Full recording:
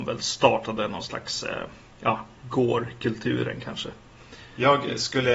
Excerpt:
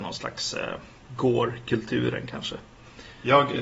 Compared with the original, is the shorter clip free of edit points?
no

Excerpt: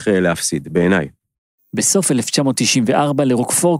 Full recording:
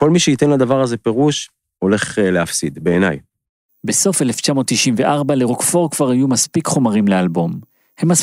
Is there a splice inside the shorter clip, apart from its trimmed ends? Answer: no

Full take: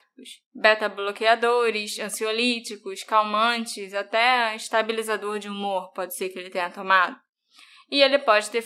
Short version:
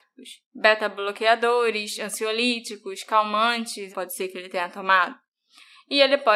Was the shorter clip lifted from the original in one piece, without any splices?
no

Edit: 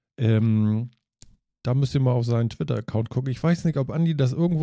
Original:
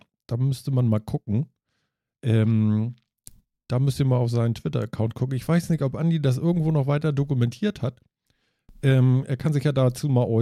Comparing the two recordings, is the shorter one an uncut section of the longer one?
yes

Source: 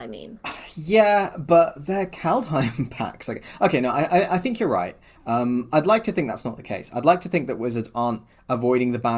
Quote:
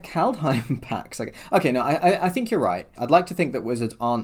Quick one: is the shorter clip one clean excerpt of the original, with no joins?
no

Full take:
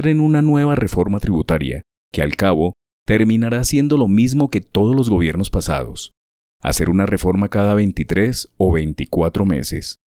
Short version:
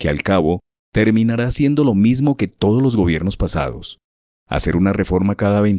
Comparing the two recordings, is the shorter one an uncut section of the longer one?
yes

